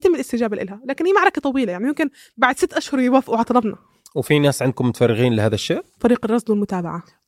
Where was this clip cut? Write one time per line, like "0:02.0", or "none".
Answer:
0:06.0